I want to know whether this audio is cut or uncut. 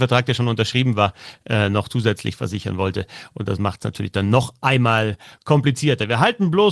uncut